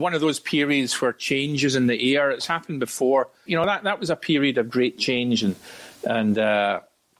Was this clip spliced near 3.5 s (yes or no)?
yes